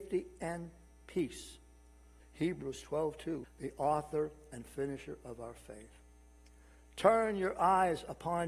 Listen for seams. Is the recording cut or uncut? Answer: cut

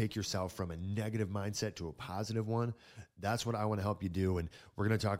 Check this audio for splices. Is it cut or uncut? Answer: uncut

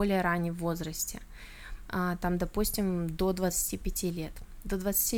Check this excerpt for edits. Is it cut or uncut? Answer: uncut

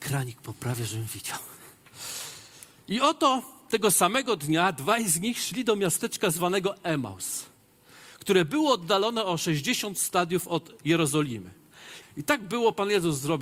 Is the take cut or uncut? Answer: cut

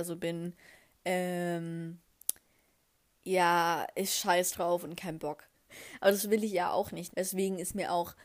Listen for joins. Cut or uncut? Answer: cut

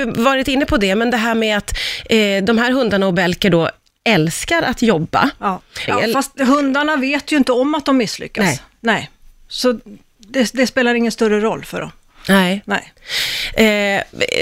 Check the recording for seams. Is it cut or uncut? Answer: cut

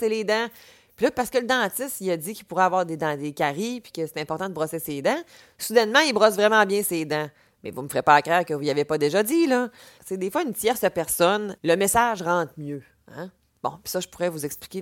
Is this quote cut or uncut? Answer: cut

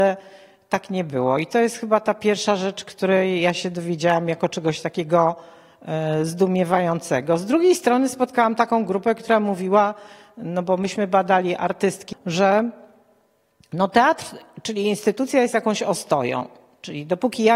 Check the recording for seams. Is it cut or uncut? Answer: cut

